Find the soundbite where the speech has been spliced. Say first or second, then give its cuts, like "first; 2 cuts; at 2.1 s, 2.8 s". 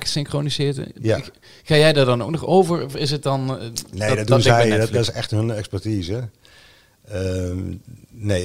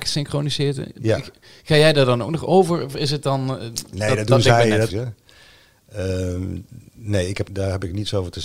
second; 2 cuts; at 4.9 s, 7.5 s